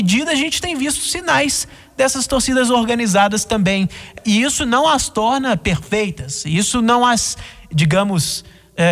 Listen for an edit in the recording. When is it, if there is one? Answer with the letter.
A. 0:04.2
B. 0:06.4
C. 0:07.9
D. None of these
A